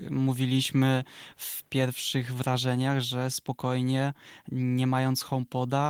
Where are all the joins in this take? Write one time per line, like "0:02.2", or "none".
none